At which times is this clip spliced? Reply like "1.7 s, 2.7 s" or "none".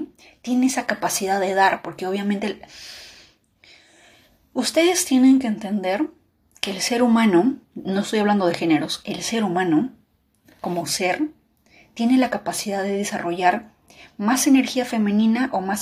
7.6 s